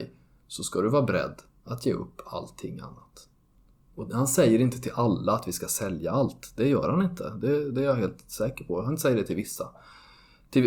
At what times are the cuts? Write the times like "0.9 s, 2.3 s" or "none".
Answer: none